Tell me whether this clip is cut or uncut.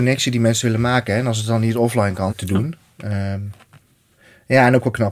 cut